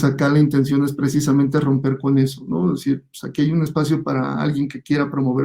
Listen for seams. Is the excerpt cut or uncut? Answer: uncut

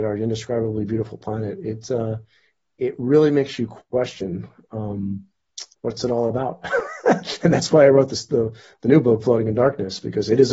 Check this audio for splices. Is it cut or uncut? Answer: uncut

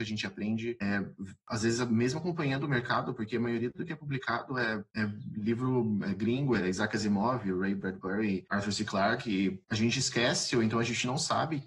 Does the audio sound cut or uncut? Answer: cut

